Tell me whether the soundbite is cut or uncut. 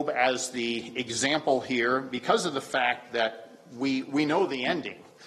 uncut